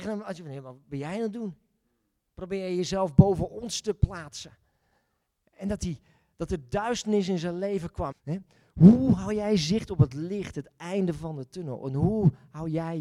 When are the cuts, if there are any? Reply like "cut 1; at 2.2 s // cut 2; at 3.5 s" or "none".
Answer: cut 1; at 8.1 s